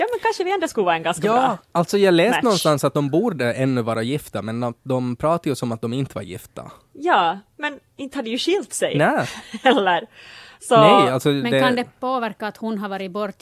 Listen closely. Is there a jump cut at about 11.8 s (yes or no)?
no